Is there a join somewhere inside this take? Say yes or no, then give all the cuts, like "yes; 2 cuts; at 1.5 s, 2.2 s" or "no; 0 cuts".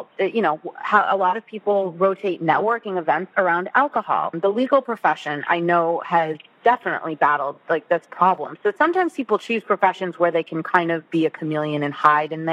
no; 0 cuts